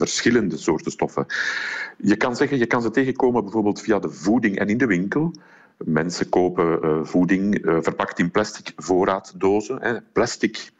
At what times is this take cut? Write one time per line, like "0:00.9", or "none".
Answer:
none